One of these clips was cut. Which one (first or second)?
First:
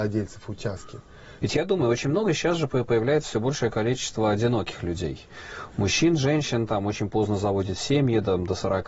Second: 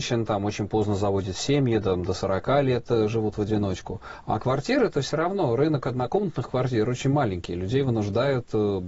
first